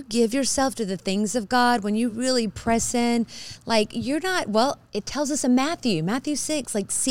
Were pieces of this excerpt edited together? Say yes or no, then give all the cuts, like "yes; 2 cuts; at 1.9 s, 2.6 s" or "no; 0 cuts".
no; 0 cuts